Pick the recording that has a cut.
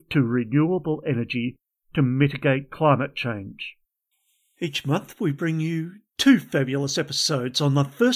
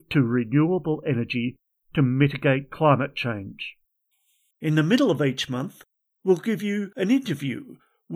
second; 1 cut; at 4.5 s

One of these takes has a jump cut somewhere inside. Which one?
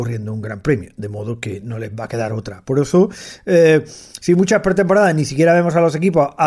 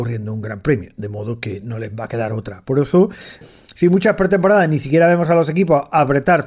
second; 1 cut; at 3.4 s

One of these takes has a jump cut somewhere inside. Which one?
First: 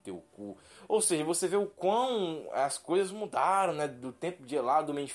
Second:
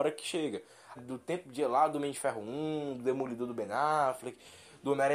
second; 1 cut; at 1.0 s

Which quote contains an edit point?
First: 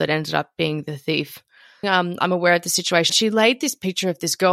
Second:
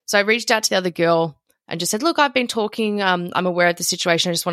first; 2 cuts; at 1.8 s, 3.1 s

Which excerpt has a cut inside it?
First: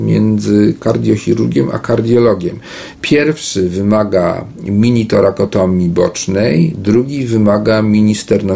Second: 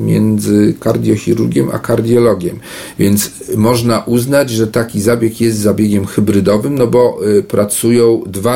first; 1 cut; at 2.9 s

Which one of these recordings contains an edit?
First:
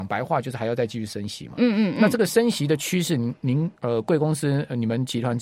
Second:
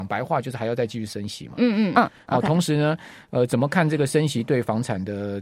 second; 1 cut; at 1.9 s

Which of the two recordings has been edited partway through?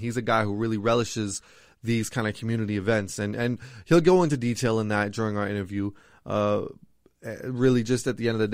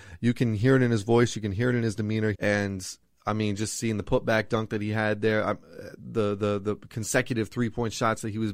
second; 1 cut; at 2.3 s

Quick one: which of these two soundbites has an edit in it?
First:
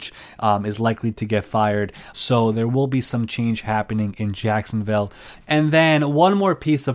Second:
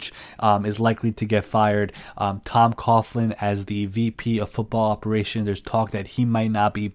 first; 2 cuts; at 2.1 s, 5.3 s

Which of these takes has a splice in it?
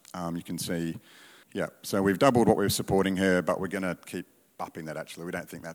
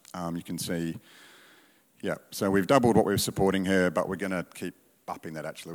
first; 1 cut; at 1.4 s

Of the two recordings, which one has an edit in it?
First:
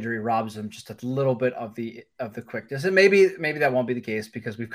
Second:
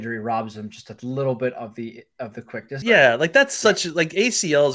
second; 1 cut; at 2.8 s

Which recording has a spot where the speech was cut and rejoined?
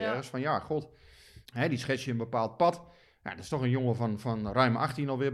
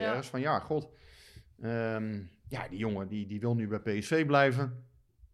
first; 1 cut; at 1.5 s

